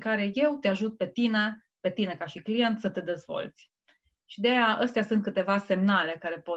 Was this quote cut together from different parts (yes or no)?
no